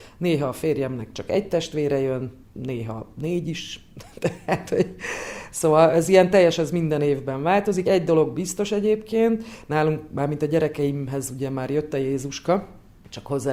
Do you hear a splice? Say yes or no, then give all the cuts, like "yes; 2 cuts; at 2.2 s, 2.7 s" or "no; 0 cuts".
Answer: no; 0 cuts